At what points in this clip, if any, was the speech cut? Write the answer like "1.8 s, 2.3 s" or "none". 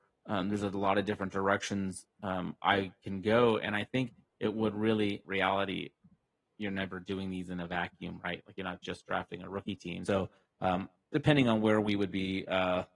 5.2 s, 10.1 s